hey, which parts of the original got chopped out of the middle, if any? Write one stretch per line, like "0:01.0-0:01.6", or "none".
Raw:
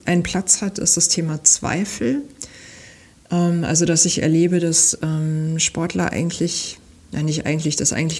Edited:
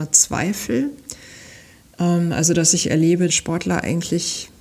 0:04.6-0:05.6